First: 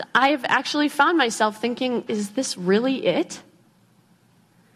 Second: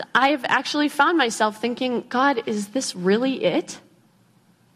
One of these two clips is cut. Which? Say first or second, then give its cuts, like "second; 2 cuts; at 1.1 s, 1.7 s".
first; 1 cut; at 2.1 s